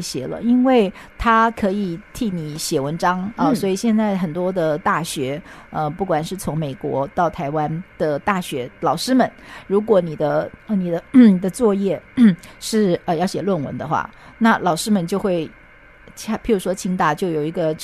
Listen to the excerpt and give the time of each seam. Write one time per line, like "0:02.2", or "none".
none

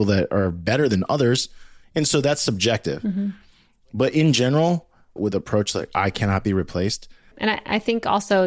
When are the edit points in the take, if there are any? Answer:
0:05.2
0:07.3

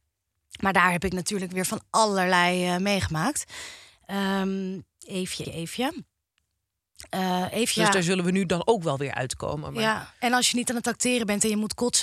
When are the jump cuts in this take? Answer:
0:05.4
0:07.8

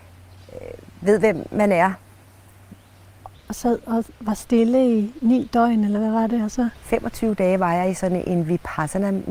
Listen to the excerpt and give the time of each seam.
0:03.3

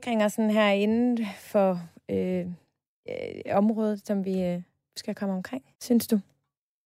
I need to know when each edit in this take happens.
0:05.7

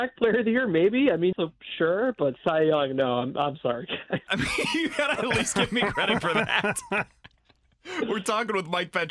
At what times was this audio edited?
0:01.3
0:04.3

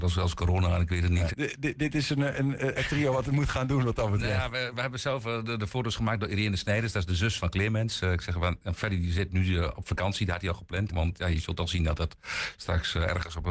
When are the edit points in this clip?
0:01.3
0:07.4
0:10.9

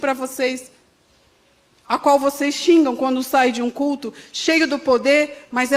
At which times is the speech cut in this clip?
none

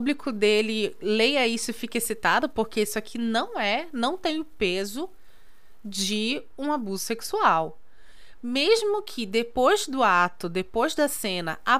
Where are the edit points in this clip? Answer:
none

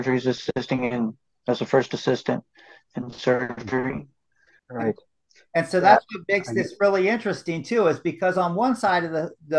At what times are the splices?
0:04.6

